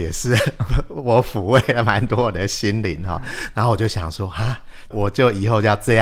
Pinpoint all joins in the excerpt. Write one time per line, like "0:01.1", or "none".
0:03.5